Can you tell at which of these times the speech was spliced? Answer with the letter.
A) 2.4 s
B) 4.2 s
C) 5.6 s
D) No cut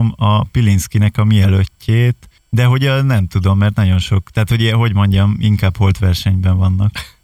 A